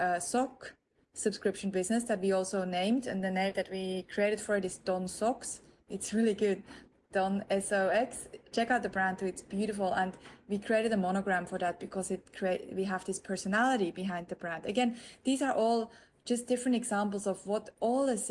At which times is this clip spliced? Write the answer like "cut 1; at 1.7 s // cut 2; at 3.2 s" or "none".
none